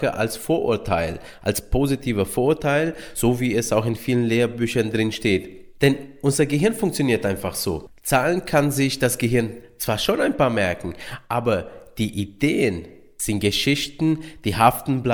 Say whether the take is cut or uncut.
uncut